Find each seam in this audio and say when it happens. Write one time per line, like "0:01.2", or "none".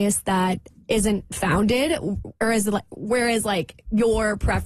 none